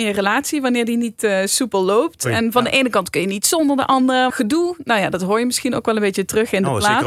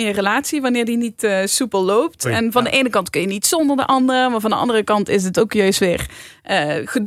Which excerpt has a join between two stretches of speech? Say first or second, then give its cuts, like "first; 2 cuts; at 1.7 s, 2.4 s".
first; 1 cut; at 4.3 s